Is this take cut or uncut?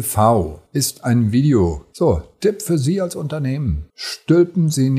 cut